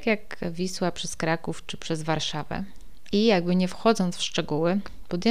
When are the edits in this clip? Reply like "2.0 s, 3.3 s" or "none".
3.1 s